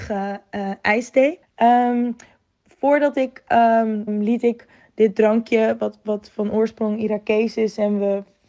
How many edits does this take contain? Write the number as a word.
two